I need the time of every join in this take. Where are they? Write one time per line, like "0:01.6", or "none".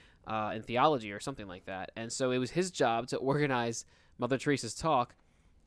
none